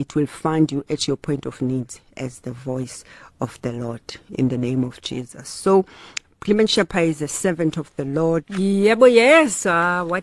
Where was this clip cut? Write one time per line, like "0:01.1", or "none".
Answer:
0:08.4